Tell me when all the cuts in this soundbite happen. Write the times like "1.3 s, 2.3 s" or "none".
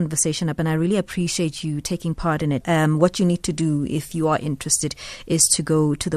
2.6 s

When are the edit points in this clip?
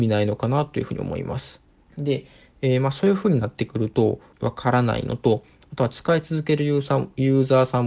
1.8 s, 4.3 s

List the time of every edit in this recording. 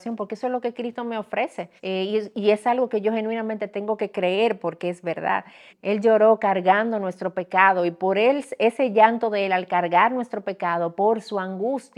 1.8 s, 5.7 s

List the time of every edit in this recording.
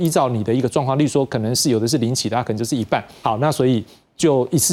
3.2 s

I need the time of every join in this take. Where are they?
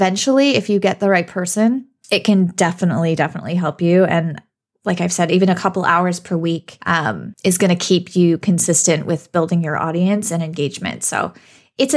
none

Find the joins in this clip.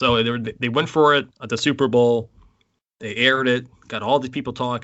1.3 s

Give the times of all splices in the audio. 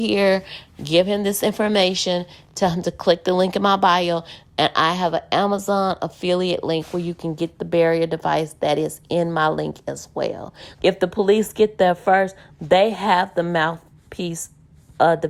10.7 s

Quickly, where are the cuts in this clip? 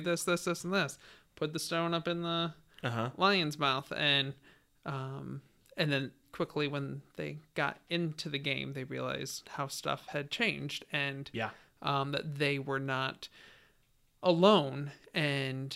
none

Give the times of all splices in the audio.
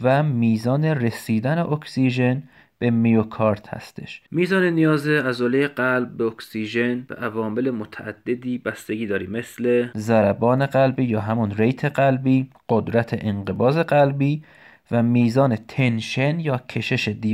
none

